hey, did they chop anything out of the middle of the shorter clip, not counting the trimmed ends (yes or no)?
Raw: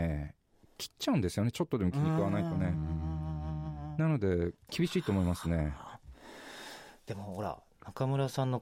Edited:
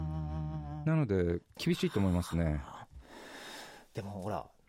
no